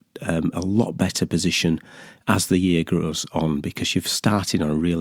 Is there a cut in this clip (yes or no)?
no